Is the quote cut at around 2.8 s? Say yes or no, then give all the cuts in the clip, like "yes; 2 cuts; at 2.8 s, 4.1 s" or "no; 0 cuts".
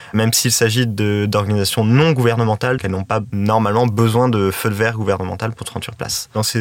yes; 1 cut; at 2.8 s